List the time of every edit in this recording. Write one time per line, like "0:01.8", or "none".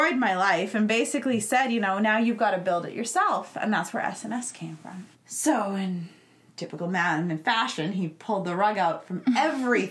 0:05.1